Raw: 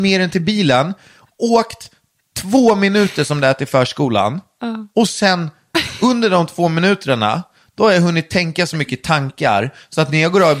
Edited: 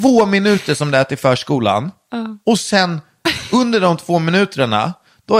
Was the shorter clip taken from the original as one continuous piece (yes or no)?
yes